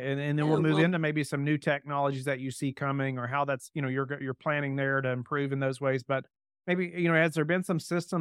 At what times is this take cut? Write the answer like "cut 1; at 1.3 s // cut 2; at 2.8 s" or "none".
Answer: none